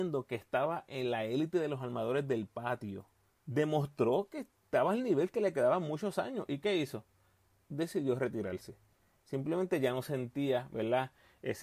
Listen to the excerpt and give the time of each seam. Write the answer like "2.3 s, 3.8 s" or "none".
3.3 s